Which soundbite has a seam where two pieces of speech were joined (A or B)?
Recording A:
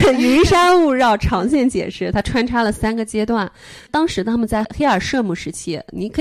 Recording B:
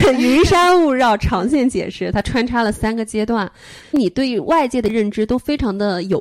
B